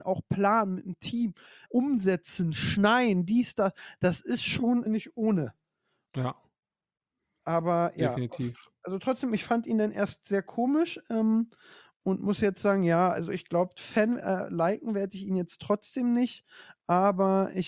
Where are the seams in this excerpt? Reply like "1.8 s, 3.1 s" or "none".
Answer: 1.7 s, 4.9 s